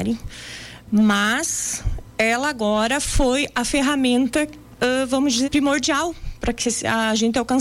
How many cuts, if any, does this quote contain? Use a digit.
1